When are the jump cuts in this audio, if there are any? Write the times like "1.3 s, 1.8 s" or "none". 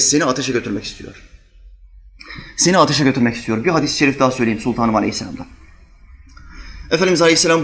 none